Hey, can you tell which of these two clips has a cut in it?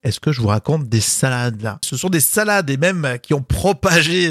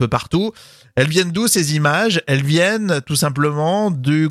first; 1 cut; at 1.8 s

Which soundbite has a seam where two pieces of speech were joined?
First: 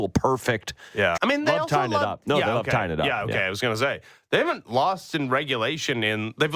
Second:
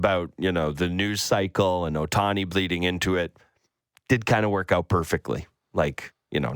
first; 1 cut; at 1.2 s

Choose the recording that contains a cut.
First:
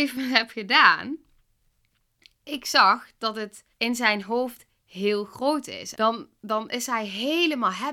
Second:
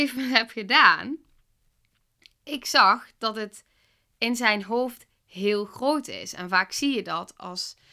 first; 2 cuts; at 3.7 s, 5.9 s

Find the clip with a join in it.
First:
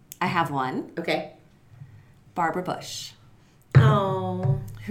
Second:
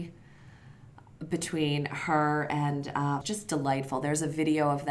second; 1 cut; at 3.2 s

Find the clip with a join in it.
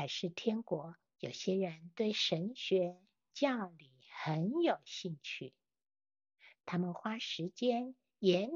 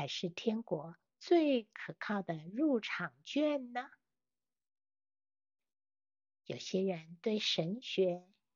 first; 1 cut; at 1.2 s

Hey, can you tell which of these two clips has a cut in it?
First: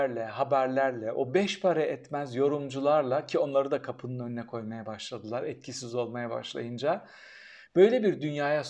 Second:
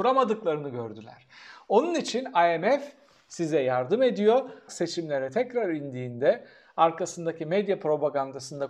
second; 1 cut; at 4.7 s

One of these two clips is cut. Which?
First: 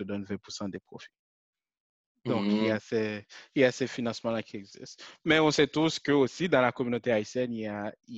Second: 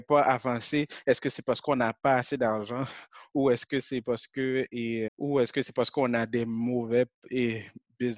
second; 1 cut; at 5.1 s

